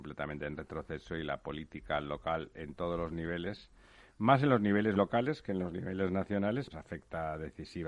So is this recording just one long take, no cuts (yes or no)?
no